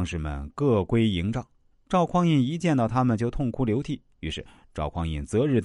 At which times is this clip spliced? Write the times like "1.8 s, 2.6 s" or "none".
1.7 s, 4.1 s